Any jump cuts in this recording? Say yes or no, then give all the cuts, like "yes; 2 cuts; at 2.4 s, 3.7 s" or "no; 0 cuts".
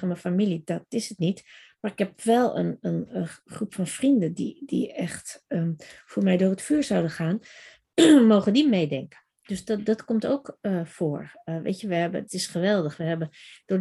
yes; 1 cut; at 12.3 s